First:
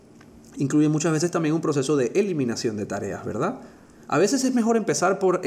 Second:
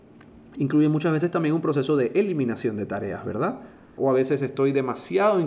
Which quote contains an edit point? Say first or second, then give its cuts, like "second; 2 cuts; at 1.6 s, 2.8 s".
second; 1 cut; at 4.0 s